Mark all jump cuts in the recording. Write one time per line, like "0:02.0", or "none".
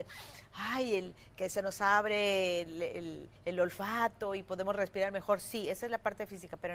none